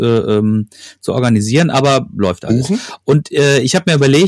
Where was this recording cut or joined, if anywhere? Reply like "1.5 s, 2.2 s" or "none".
none